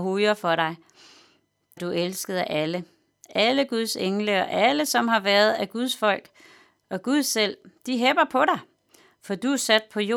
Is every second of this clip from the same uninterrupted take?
no; 1 cut; at 1.8 s

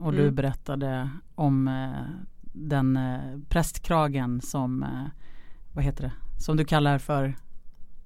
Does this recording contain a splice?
no; 0 cuts

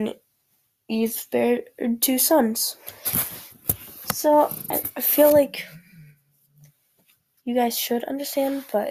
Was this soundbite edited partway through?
no; 0 cuts

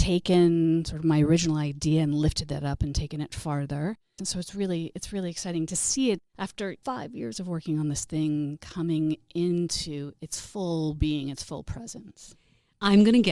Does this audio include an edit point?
yes; 1 cut; at 4.2 s

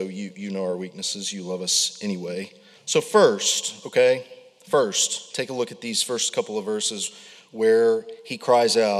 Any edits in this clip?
yes; 1 cut; at 2.8 s

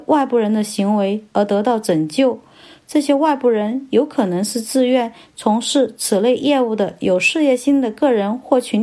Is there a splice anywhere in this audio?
no; 0 cuts

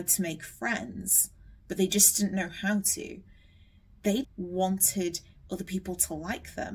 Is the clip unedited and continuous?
no; 1 cut; at 4.2 s

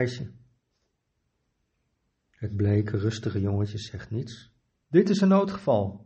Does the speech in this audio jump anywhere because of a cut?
yes; 1 cut; at 4.8 s

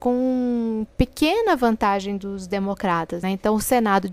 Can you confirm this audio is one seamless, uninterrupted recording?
no; 1 cut; at 3.2 s

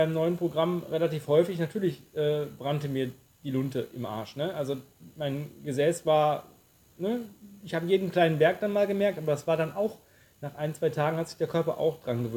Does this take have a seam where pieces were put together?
no; 0 cuts

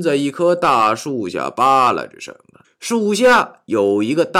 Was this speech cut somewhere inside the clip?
yes; 1 cut; at 2.6 s

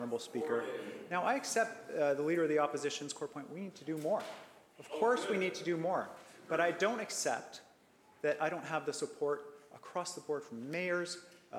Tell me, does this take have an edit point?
no; 0 cuts

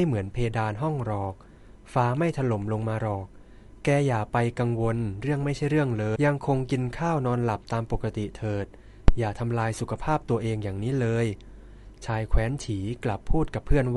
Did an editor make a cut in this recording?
yes; 1 cut; at 6.2 s

